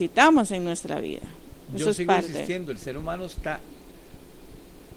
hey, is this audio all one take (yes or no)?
yes